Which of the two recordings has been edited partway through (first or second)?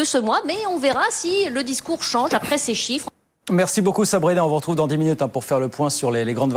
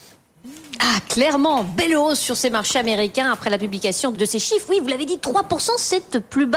second